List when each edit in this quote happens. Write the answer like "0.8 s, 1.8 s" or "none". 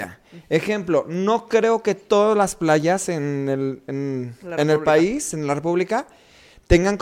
none

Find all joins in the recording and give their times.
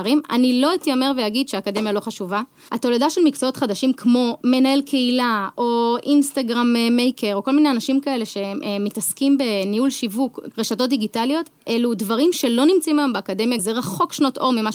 2.7 s, 10.5 s, 13.6 s

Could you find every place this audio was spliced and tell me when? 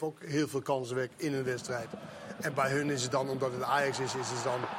none

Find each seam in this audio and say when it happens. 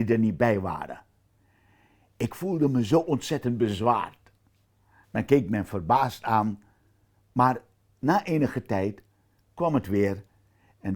5.0 s

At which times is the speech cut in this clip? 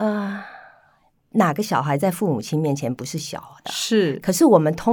none

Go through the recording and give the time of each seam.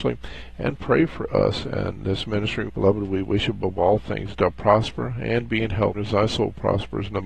2.7 s, 5.9 s

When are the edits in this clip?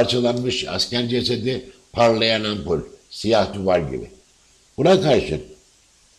none

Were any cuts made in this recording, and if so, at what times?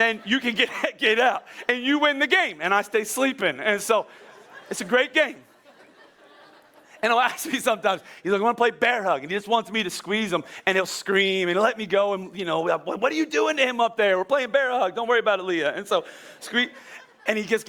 none

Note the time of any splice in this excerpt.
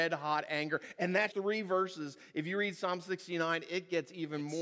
1.3 s

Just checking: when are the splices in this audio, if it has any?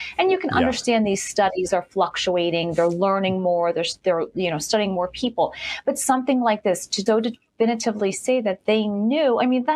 7.1 s

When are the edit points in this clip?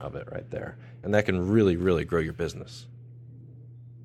1.0 s

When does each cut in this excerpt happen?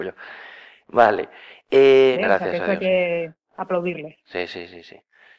2.1 s

